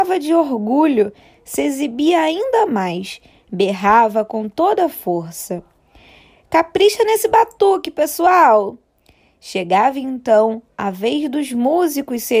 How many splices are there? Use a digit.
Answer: 0